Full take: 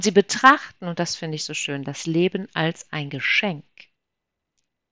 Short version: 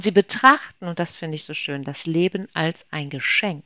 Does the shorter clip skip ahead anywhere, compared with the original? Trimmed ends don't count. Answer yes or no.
no